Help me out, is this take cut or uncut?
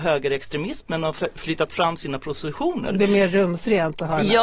uncut